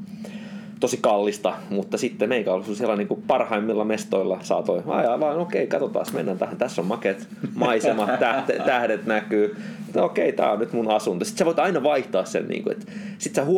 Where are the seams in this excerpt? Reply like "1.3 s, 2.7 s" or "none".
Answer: none